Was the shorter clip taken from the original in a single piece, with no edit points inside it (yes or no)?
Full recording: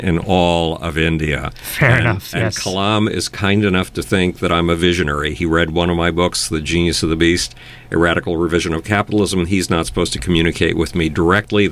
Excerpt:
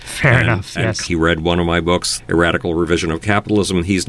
no